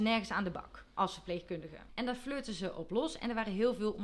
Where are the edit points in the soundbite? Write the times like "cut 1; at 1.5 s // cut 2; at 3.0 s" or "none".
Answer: cut 1; at 1.9 s